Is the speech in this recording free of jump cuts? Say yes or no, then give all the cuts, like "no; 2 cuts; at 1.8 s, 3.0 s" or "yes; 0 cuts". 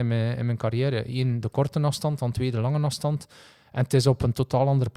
yes; 0 cuts